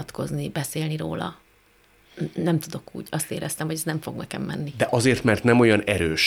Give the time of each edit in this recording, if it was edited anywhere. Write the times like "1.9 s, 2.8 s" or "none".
none

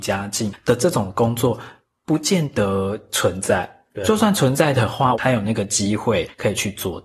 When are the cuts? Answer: 5.1 s

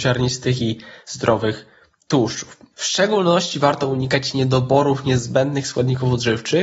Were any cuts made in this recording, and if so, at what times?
2.7 s

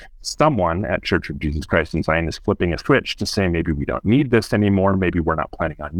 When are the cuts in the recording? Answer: none

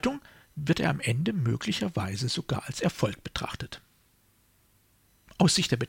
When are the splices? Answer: none

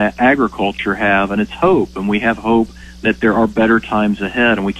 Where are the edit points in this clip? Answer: none

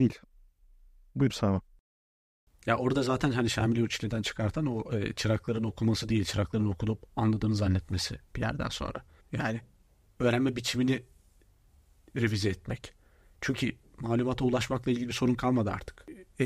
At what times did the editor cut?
9.2 s

